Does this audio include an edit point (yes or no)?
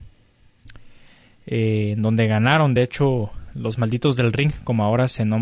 no